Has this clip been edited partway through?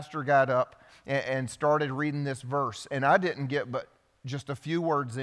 no; 0 cuts

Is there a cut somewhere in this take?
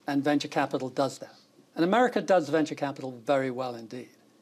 no; 0 cuts

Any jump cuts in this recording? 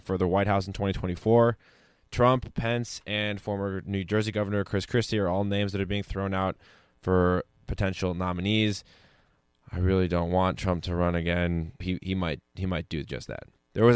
yes; 1 cut; at 11.8 s

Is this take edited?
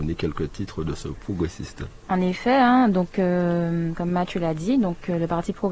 no; 0 cuts

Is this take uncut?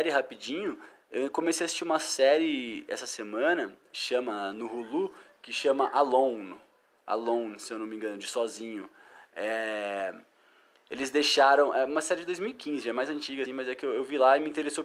no; 1 cut; at 13.4 s

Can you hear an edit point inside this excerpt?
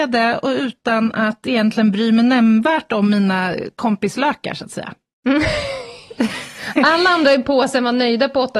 no; 0 cuts

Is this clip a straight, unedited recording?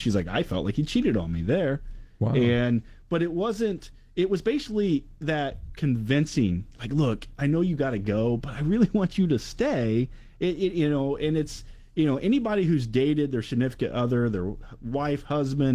yes; 0 cuts

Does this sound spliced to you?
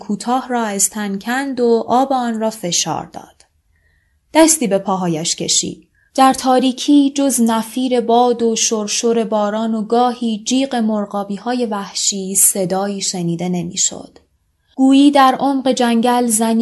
yes; 1 cut; at 6.1 s

